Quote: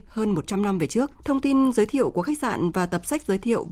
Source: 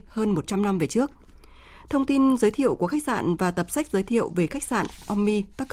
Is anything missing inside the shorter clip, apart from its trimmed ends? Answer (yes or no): yes